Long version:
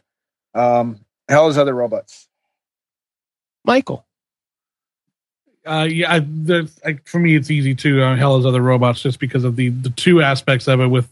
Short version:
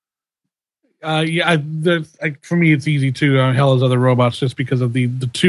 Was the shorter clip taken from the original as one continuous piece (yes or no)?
yes